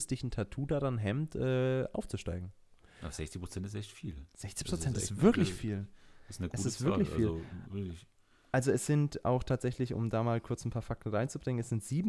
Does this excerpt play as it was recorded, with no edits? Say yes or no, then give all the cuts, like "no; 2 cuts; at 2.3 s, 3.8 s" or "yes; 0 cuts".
yes; 0 cuts